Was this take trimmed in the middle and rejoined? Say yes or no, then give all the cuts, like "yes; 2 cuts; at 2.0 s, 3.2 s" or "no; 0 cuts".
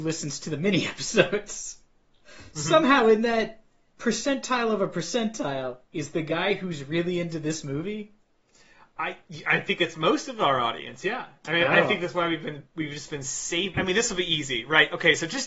yes; 2 cuts; at 5.8 s, 13.7 s